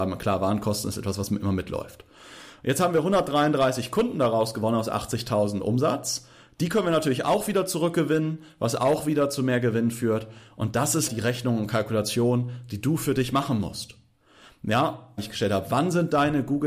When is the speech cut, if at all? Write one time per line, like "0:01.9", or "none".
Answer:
0:11.1
0:15.2